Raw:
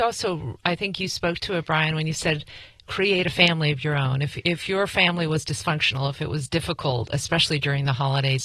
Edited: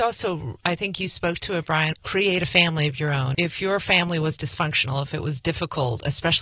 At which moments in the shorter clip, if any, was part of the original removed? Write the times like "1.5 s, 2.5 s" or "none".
1.9 s, 3.3 s